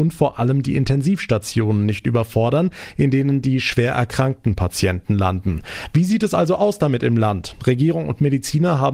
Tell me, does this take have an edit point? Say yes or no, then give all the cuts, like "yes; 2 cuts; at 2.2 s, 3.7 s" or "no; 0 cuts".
no; 0 cuts